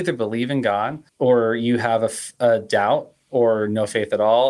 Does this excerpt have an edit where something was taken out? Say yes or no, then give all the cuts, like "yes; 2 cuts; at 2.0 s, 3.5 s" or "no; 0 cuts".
yes; 1 cut; at 1.1 s